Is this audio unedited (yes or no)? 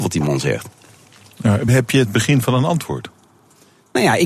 yes